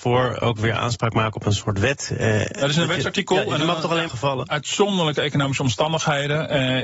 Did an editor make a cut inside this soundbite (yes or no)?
yes